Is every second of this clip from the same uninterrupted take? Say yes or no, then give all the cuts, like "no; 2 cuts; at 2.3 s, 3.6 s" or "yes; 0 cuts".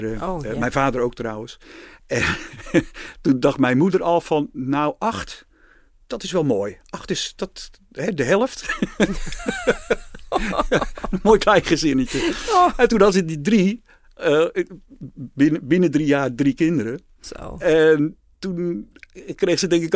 yes; 0 cuts